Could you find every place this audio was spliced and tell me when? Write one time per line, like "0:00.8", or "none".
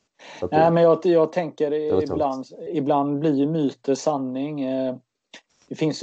0:02.7